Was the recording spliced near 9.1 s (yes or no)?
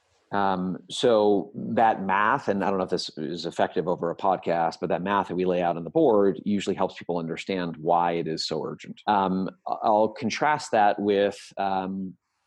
yes